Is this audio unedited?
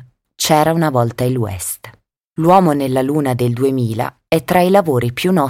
no; 2 cuts; at 2.2 s, 4.3 s

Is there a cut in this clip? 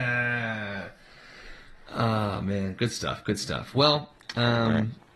no; 0 cuts

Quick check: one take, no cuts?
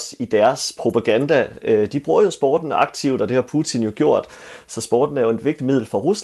yes; 0 cuts

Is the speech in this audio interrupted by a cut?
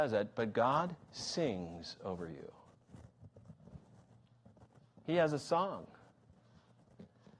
no; 0 cuts

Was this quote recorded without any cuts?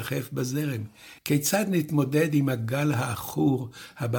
no; 1 cut; at 1.2 s

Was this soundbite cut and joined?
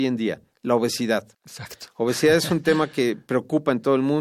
yes; 1 cut; at 1.3 s

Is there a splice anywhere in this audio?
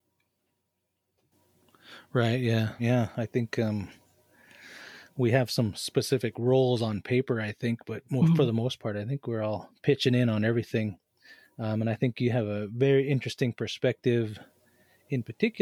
yes; 1 cut; at 2.8 s

